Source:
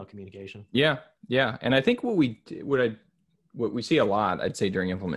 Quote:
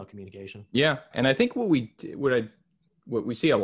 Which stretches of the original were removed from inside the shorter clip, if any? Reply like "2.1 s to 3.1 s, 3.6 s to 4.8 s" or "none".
1.1 s to 1.6 s